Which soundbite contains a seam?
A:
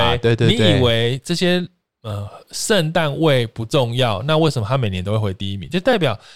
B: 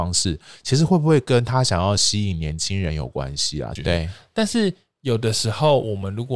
B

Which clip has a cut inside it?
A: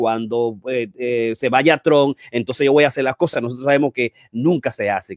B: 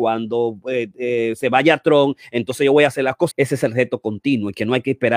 B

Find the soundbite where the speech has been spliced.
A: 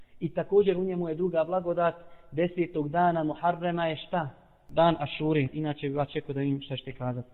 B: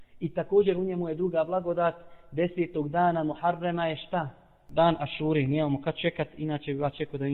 A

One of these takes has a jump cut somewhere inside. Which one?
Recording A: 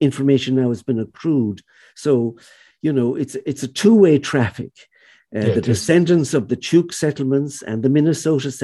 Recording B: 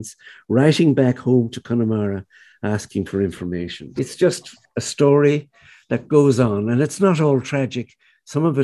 B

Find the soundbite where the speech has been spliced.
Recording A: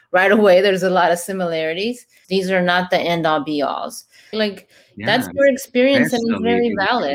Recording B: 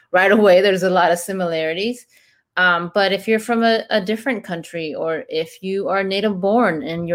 A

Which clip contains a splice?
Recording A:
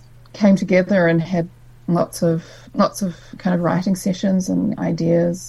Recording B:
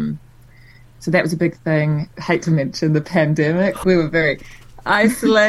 B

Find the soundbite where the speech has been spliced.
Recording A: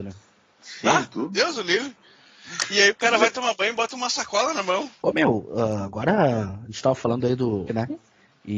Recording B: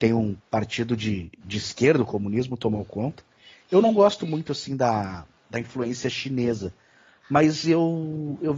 A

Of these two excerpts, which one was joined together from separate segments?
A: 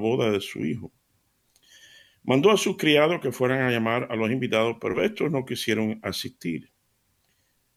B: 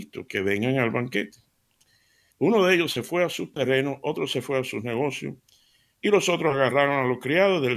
B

